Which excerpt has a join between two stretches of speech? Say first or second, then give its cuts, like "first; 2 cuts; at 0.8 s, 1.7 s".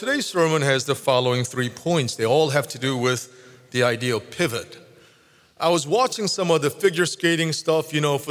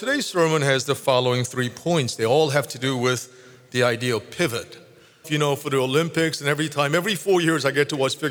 second; 1 cut; at 5.2 s